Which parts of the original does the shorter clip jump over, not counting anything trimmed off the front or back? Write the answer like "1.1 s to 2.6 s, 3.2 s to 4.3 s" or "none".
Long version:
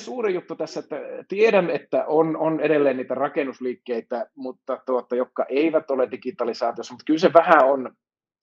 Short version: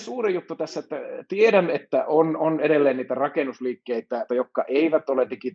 4.3 s to 5.1 s